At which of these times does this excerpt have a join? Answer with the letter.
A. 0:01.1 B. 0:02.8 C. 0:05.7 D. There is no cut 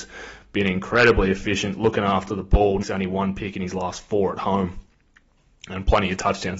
B